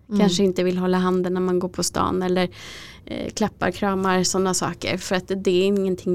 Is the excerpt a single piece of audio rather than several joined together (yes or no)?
yes